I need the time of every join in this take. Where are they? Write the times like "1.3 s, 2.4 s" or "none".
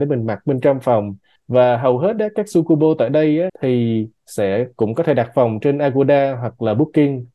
1.4 s, 3.5 s